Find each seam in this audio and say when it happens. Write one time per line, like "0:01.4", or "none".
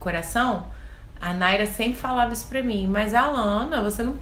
none